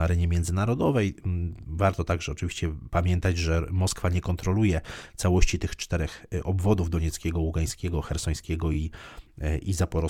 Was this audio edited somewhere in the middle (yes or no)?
no